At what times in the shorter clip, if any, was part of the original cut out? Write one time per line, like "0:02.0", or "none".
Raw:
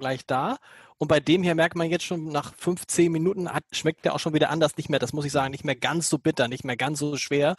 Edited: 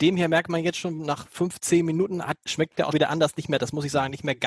0:02.9